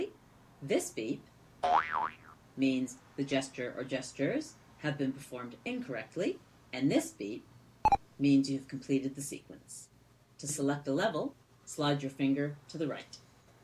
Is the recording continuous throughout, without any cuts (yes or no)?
yes